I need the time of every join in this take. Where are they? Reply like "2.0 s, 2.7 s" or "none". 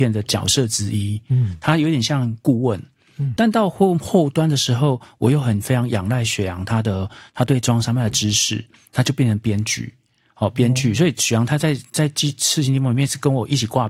3.4 s